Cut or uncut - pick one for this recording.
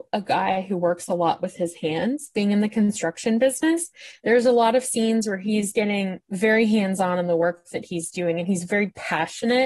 uncut